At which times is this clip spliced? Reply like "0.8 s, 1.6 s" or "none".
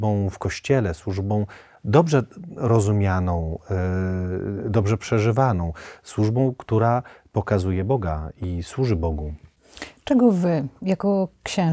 none